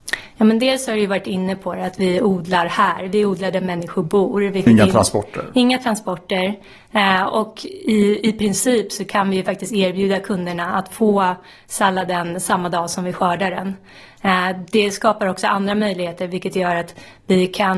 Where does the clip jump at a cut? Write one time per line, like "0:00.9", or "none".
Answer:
none